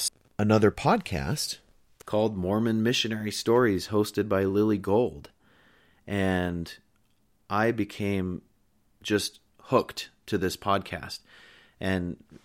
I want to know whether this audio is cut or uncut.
uncut